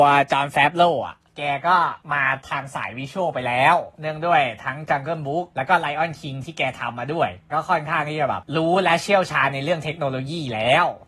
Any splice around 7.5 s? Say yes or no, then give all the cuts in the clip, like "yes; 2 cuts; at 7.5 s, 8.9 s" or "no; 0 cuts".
yes; 1 cut; at 7.5 s